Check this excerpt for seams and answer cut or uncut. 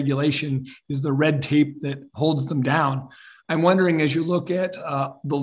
uncut